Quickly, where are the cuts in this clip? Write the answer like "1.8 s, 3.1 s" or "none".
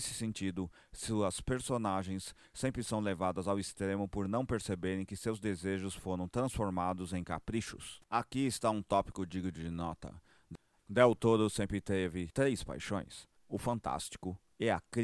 8.0 s, 10.8 s, 13.4 s